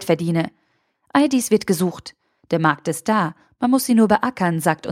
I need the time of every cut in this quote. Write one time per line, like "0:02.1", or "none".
0:00.9